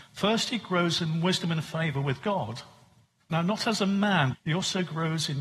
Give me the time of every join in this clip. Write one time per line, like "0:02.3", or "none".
0:03.2
0:04.3